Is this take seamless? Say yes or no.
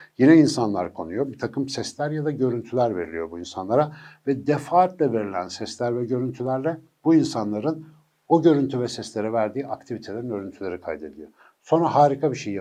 yes